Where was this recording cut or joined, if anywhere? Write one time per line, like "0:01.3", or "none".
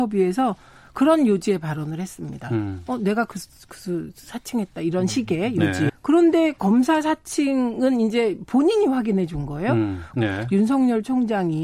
0:05.9
0:10.1